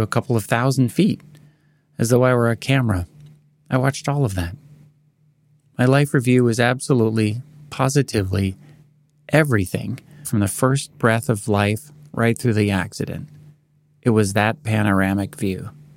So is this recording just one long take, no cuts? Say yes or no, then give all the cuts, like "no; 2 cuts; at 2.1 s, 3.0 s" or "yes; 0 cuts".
no; 1 cut; at 10.2 s